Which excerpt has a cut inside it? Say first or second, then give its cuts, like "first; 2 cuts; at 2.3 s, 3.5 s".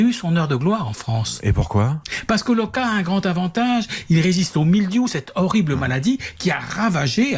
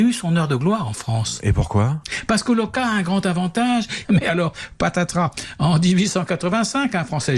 second; 1 cut; at 4.0 s